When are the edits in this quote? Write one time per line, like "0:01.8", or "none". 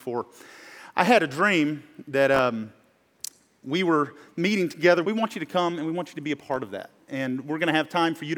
0:05.0